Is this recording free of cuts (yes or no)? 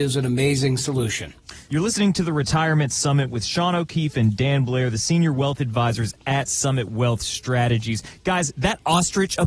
yes